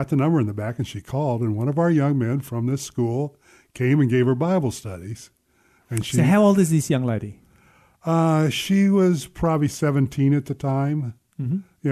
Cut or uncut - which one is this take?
uncut